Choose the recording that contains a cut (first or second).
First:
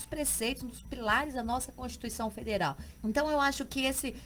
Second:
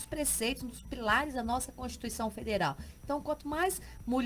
first